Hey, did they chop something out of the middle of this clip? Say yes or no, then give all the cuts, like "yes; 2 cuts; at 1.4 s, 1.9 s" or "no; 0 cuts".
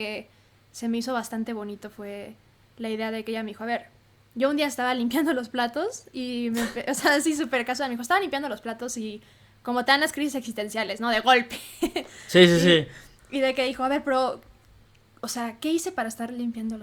no; 0 cuts